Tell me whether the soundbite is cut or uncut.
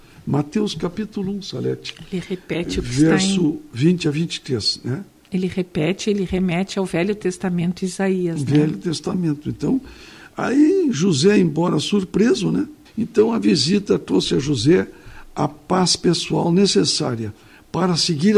cut